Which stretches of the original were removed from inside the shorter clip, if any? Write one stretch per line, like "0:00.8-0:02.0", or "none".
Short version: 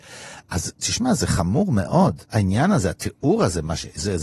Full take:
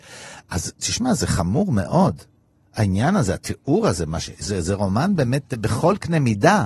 0:02.3-0:02.7